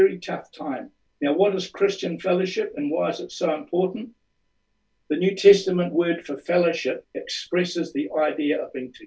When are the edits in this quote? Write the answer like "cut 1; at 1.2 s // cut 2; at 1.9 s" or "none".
cut 1; at 1.1 s // cut 2; at 7.0 s

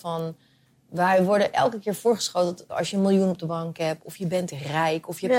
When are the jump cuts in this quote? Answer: cut 1; at 2.7 s

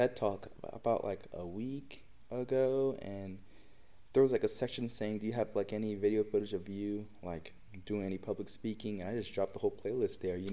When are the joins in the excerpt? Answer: none

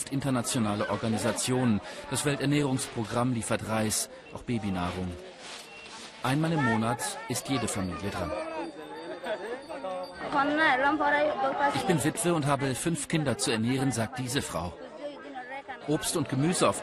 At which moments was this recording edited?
cut 1; at 15.8 s

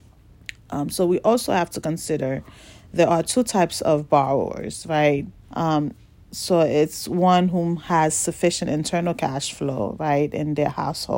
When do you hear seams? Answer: cut 1; at 5.3 s

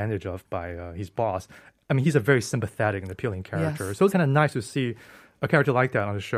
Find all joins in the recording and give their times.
cut 1; at 4.1 s

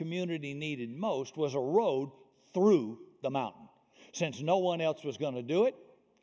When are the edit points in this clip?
none

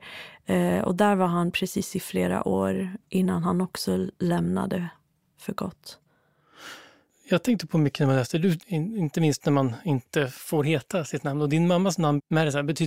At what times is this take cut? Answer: cut 1; at 8.6 s

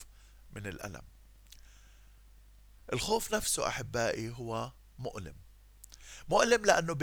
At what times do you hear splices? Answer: none

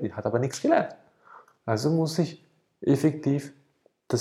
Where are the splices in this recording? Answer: cut 1; at 1.5 s

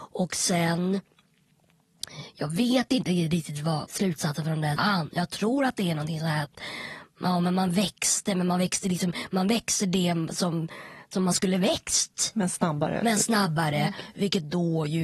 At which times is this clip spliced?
cut 1; at 4.8 s

